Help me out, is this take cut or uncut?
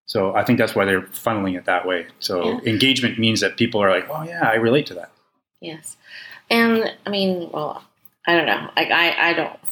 uncut